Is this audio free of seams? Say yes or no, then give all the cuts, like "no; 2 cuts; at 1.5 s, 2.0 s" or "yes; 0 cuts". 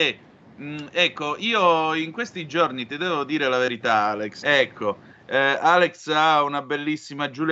no; 1 cut; at 4.4 s